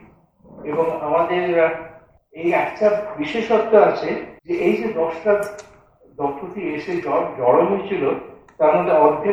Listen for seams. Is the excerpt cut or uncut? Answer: cut